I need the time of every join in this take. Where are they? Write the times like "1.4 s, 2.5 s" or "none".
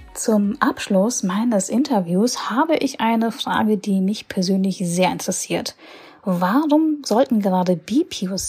none